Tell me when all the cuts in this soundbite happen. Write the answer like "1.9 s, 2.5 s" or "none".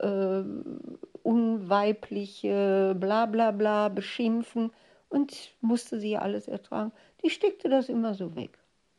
none